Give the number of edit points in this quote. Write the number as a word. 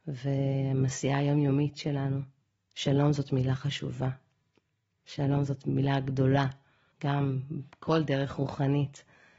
two